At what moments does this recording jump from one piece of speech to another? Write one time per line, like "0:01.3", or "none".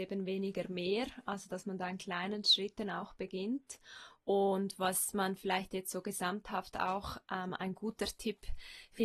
none